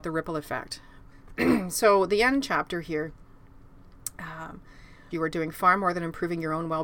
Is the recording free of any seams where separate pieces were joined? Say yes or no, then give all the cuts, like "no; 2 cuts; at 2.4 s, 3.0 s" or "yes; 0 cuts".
no; 2 cuts; at 1.1 s, 5.1 s